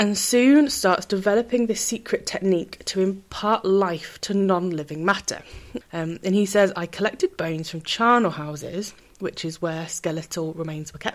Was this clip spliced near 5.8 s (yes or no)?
yes